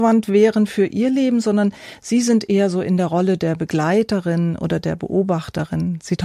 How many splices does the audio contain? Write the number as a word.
zero